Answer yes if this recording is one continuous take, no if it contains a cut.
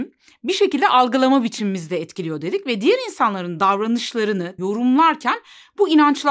no